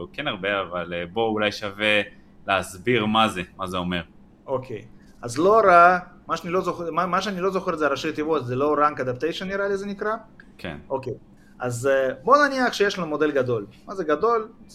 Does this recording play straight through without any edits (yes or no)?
yes